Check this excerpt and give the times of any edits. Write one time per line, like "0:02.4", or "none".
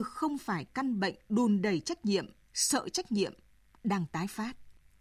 0:02.5